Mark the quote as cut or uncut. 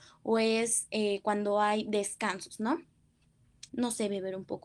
cut